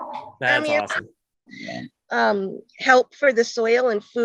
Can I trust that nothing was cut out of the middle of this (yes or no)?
no